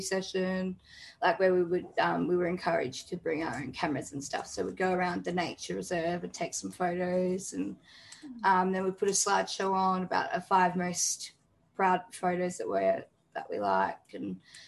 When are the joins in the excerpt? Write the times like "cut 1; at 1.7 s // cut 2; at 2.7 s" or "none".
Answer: none